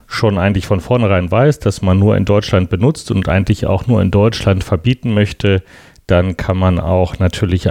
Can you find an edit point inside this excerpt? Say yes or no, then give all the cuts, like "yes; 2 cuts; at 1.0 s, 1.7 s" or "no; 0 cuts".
no; 0 cuts